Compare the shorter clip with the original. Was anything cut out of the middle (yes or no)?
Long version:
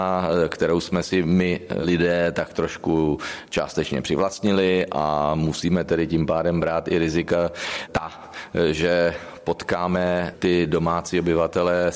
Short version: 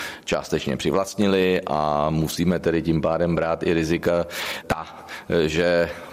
no